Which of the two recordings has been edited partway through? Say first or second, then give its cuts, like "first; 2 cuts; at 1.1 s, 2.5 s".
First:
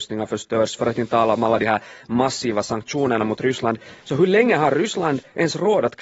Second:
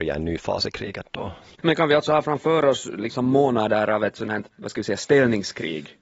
second; 2 cuts; at 1.5 s, 4.5 s